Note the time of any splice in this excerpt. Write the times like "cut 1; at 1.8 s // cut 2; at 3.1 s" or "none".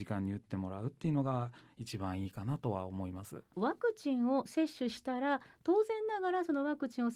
cut 1; at 3.5 s